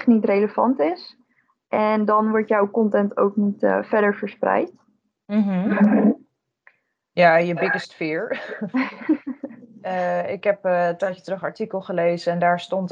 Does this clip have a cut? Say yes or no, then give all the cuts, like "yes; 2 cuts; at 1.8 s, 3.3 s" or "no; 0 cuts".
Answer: no; 0 cuts